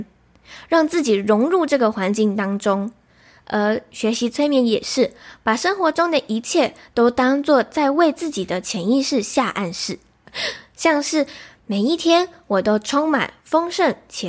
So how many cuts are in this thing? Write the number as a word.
one